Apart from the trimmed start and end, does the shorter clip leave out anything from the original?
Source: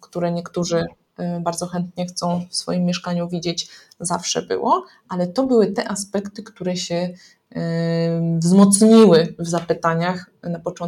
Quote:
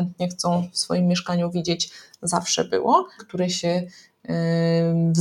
yes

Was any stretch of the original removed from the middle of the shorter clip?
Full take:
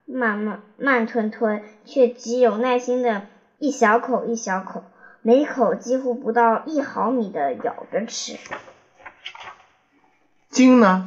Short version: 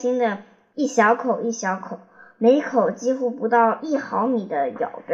no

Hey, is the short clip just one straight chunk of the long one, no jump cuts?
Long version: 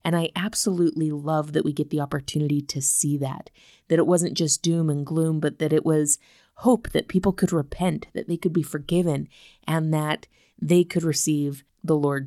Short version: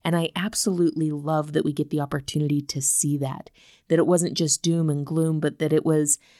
yes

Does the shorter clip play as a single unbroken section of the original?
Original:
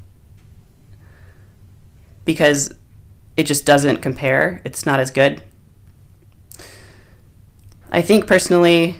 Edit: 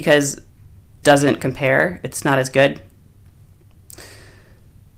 no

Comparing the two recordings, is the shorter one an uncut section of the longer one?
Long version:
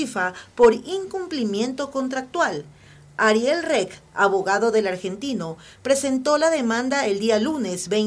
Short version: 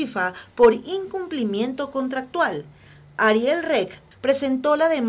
no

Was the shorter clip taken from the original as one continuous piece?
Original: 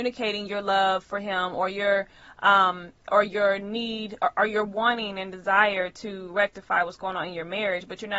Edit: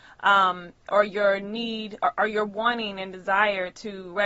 yes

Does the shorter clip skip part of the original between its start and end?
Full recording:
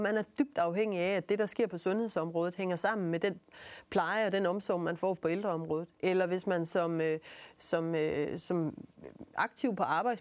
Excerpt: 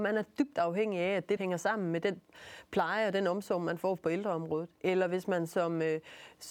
yes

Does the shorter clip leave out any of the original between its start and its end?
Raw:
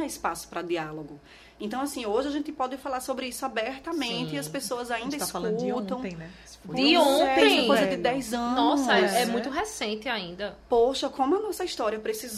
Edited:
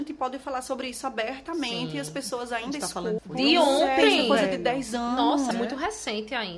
yes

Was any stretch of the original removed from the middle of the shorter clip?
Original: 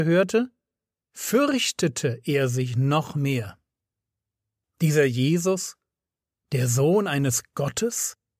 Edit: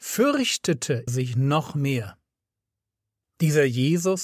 yes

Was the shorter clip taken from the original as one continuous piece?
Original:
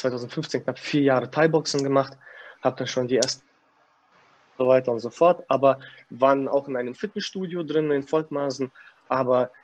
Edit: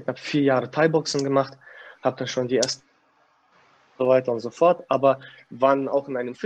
yes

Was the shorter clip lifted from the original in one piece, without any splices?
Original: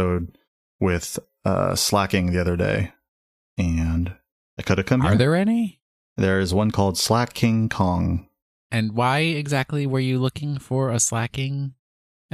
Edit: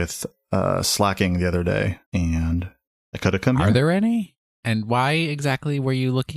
no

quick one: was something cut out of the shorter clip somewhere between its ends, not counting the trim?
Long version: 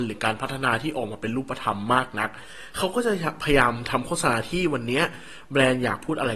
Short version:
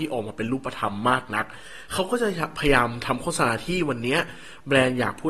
no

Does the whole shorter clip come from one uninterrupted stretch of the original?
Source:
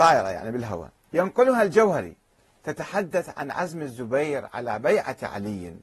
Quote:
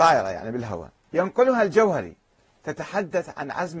yes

